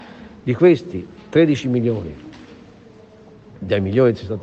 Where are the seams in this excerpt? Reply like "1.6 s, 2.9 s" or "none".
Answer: none